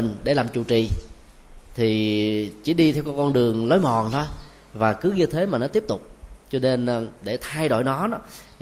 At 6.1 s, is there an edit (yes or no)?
no